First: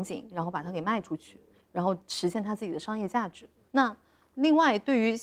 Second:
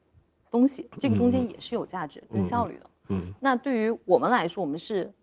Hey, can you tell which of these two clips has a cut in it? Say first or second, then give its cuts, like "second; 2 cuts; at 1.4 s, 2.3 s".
first; 1 cut; at 3.7 s